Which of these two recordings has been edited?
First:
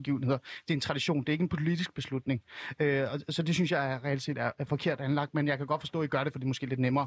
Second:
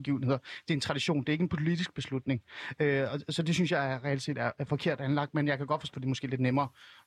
second; 1 cut; at 5.9 s

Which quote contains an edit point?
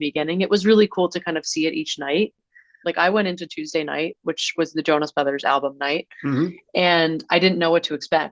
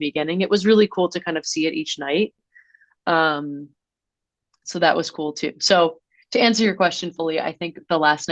first; 1 cut; at 2.8 s

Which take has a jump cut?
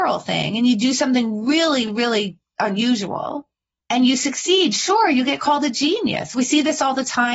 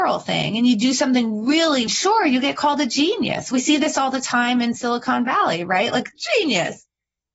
second; 1 cut; at 1.9 s

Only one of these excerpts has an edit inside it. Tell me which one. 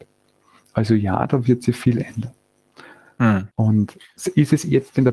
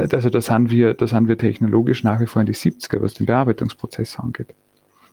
first; 1 cut; at 3.5 s

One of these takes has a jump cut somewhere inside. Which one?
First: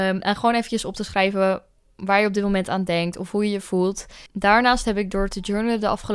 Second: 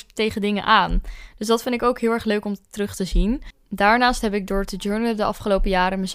first; 1 cut; at 4.3 s

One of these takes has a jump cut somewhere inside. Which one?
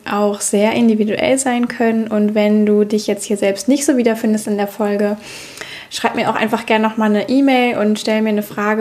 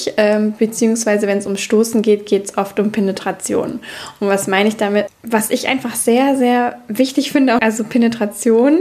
second; 2 cuts; at 5.1 s, 7.6 s

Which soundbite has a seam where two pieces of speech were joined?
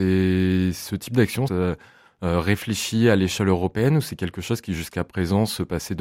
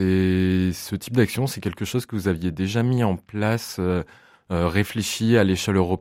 first; 1 cut; at 1.5 s

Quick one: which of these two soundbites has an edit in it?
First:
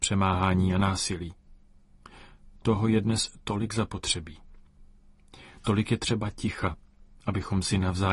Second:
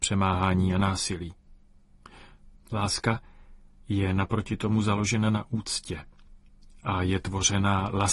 second; 1 cut; at 2.5 s

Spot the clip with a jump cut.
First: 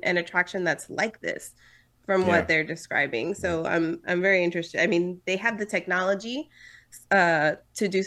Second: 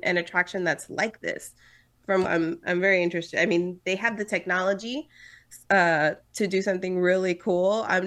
second; 1 cut; at 2.2 s

